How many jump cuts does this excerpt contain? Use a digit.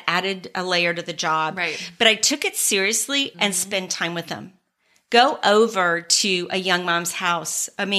1